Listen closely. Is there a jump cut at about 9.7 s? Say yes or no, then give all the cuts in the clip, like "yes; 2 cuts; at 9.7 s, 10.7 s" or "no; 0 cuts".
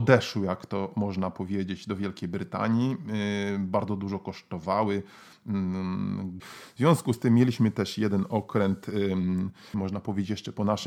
yes; 2 cuts; at 6.4 s, 9.7 s